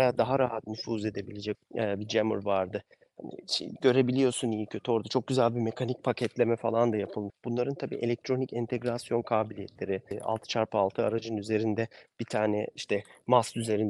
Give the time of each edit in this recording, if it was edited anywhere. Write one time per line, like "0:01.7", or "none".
0:01.5
0:07.3
0:10.1